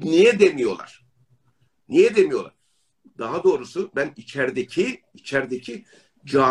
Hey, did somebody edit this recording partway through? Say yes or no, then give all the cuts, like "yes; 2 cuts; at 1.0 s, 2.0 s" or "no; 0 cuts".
no; 0 cuts